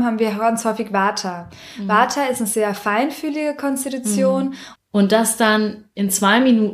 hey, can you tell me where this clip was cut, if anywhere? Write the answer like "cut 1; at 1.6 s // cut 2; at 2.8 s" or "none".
cut 1; at 4.7 s